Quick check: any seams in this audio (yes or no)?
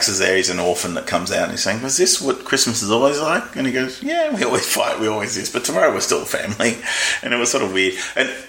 no